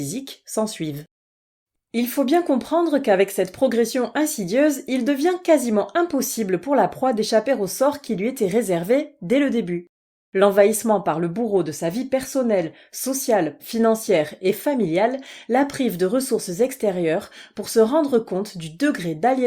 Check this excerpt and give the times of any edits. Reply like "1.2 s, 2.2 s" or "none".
13.6 s